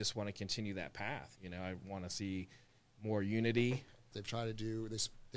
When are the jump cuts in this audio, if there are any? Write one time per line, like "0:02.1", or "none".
0:01.3
0:04.1